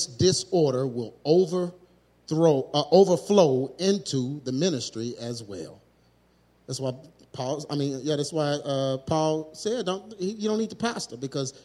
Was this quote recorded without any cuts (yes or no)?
yes